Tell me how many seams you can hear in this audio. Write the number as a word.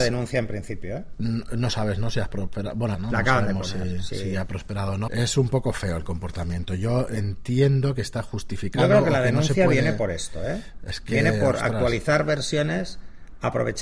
two